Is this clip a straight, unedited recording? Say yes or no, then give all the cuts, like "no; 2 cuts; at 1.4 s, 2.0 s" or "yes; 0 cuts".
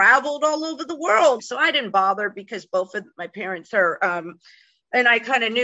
no; 1 cut; at 1.4 s